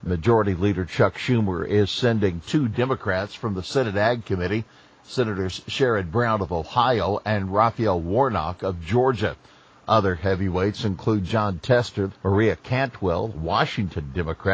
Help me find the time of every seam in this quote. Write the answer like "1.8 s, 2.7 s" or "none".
12.1 s